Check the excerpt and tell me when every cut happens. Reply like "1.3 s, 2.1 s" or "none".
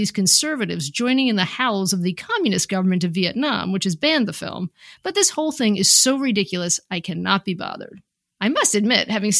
8.3 s